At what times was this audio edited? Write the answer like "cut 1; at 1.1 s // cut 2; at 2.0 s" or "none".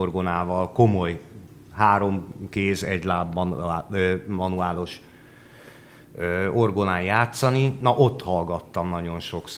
none